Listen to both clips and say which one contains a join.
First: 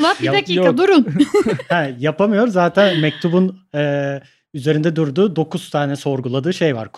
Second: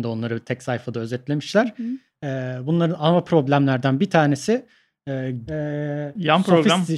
second; 1 cut; at 5.5 s

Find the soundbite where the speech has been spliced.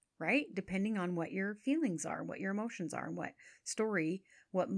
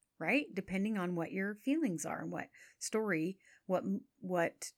second; 1 cut; at 2.2 s

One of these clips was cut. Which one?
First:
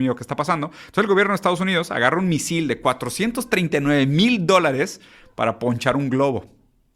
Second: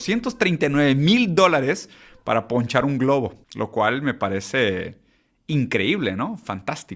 second; 1 cut; at 3.4 s

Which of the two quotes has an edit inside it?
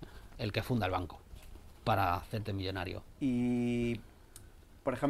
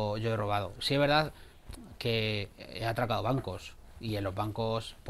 first; 1 cut; at 3.1 s

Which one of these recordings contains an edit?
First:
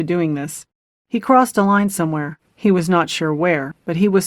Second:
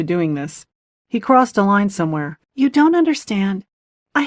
second; 1 cut; at 2.4 s

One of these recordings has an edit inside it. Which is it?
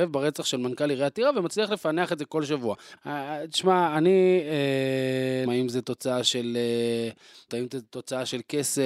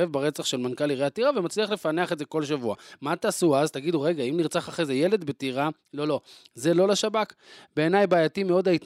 first; 3 cuts; at 3.0 s, 5.5 s, 7.5 s

